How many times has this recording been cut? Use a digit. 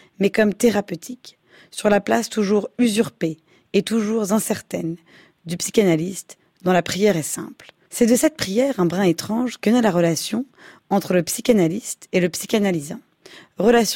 1